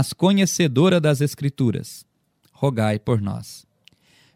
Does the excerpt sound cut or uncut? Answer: uncut